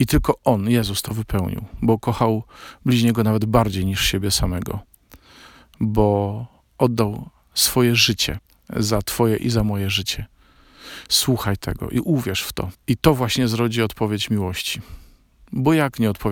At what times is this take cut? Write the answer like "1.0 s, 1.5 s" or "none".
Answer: none